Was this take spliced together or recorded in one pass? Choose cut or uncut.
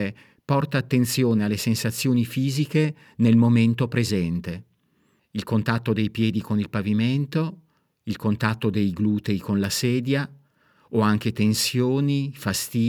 cut